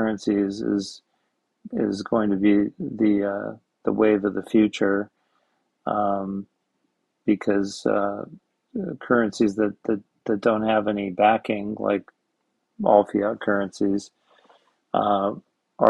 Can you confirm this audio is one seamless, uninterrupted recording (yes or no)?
yes